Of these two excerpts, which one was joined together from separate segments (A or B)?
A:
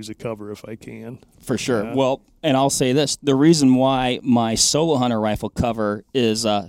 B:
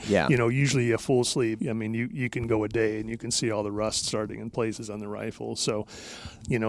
B